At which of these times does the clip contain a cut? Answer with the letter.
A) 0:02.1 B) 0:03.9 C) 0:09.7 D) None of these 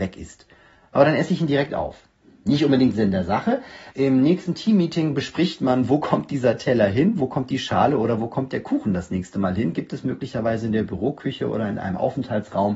B